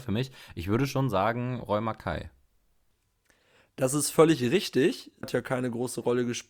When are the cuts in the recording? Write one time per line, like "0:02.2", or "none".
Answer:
0:05.2